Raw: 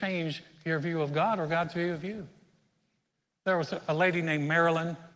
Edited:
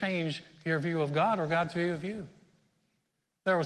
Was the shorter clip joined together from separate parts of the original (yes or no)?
no